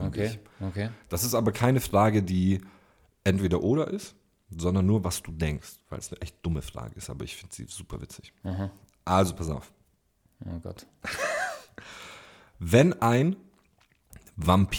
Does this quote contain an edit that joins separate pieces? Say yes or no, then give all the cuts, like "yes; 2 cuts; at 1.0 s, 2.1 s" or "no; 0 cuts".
no; 0 cuts